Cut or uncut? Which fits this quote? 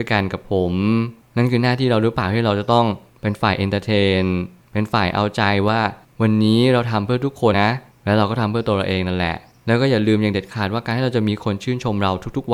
cut